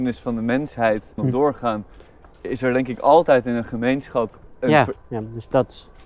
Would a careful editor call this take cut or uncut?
cut